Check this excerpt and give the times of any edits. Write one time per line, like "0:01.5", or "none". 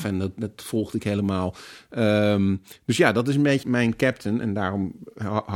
0:03.6